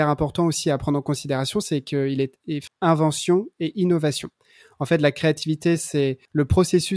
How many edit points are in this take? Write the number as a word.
one